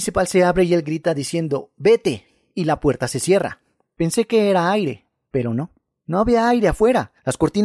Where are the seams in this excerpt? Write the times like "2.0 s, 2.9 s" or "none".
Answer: none